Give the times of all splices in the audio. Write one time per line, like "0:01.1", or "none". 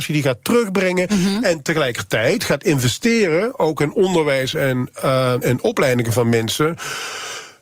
0:05.4